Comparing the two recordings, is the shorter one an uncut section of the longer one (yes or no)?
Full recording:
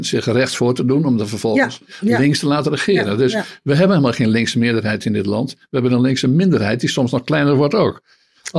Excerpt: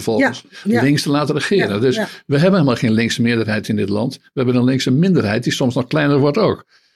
yes